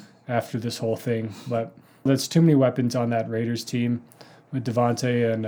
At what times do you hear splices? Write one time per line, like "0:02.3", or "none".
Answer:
0:02.1